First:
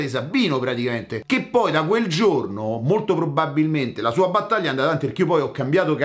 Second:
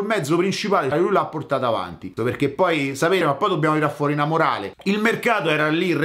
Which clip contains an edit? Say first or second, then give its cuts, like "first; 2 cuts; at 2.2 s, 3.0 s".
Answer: second; 3 cuts; at 0.9 s, 2.2 s, 3.2 s